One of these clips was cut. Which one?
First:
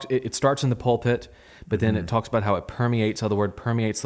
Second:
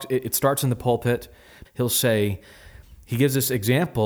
second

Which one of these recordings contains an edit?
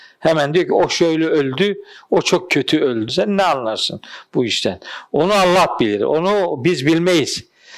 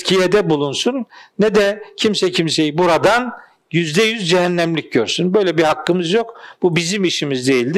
first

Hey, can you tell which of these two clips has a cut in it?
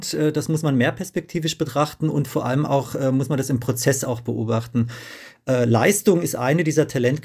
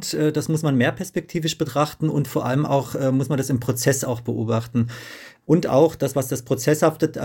second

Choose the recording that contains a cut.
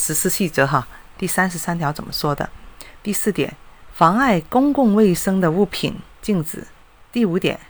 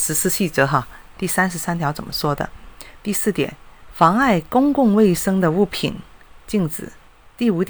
first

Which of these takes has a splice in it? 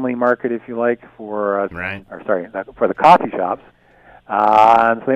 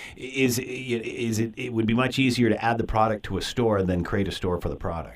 first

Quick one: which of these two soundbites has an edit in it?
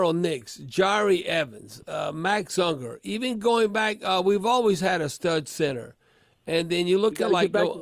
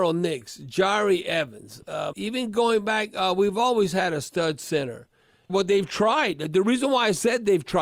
second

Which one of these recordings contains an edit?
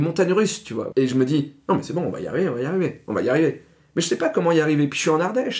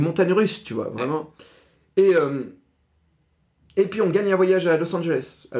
first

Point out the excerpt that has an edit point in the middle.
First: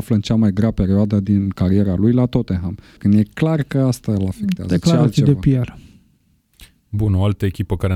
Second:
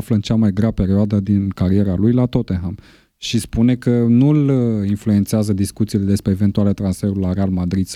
first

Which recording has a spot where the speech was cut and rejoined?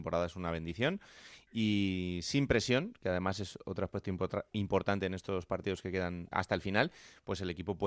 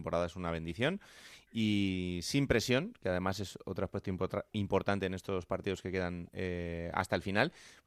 first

